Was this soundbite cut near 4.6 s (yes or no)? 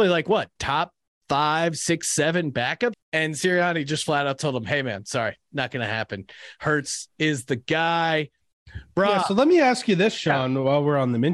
no